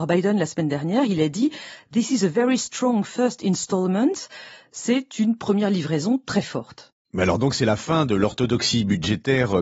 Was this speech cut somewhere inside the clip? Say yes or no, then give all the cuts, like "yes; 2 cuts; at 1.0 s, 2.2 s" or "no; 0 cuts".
no; 0 cuts